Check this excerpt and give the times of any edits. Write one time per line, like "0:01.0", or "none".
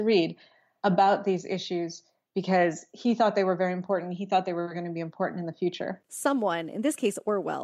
none